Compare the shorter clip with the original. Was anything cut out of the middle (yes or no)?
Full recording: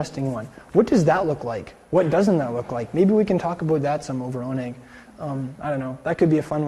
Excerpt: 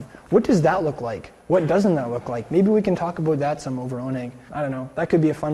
yes